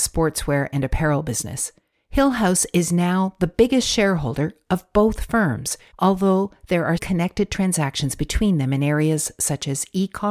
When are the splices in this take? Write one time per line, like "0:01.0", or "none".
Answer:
0:01.9
0:05.9
0:07.0